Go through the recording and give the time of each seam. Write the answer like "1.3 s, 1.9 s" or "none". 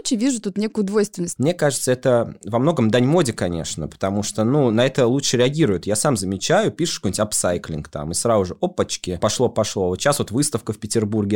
1.4 s